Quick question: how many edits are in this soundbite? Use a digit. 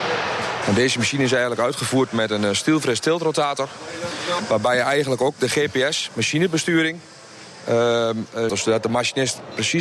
1